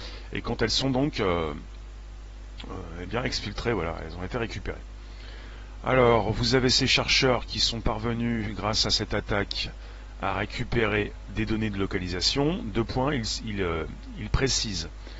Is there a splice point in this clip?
no; 0 cuts

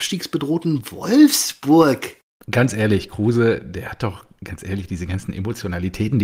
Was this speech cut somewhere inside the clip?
yes; 1 cut; at 2.3 s

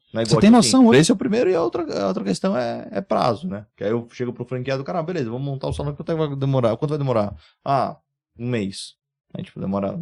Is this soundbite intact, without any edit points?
no; 1 cut; at 0.9 s

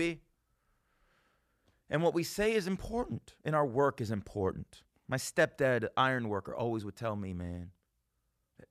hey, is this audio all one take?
yes; 0 cuts

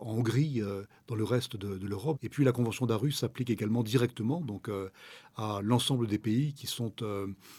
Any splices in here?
yes; 1 cut; at 2.1 s

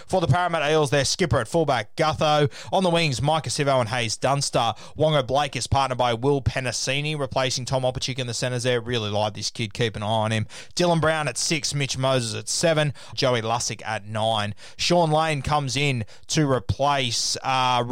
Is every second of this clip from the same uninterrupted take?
no; 1 cut; at 13.1 s

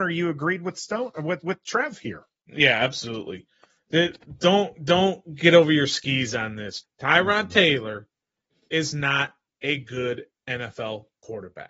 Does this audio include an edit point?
yes; 1 cut; at 6.8 s

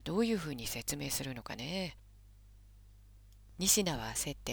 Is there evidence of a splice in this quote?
yes; 1 cut; at 3.5 s

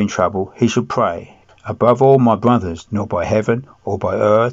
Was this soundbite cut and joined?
yes; 2 cuts; at 1.5 s, 2.8 s

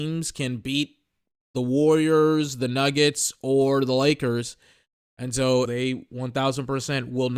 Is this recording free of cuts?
no; 1 cut; at 5.7 s

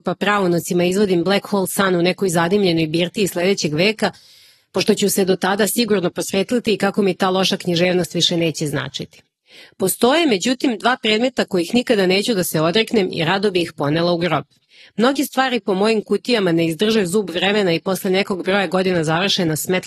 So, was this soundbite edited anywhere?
no; 0 cuts

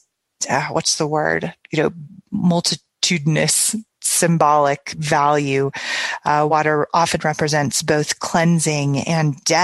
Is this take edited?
no; 0 cuts

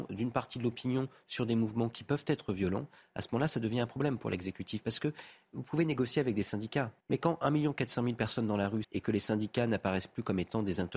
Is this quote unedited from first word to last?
no; 2 cuts; at 7.0 s, 8.8 s

